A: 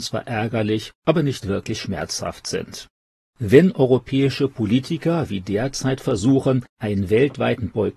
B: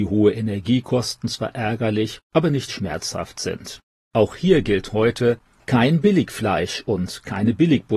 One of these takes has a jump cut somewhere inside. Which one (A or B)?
B